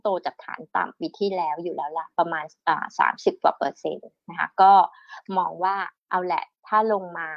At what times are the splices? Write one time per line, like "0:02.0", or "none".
0:06.0